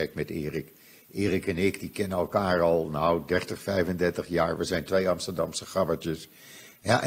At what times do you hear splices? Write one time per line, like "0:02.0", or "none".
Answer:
none